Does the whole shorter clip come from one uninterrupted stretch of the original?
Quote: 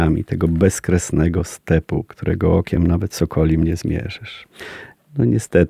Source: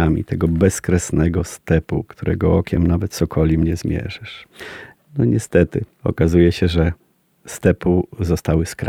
yes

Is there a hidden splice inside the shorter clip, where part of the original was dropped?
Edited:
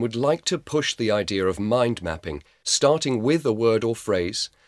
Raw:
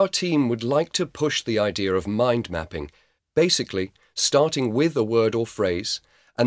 yes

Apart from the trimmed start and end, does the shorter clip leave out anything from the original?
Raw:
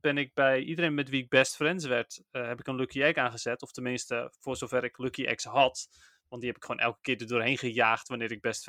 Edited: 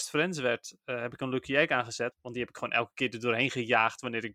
yes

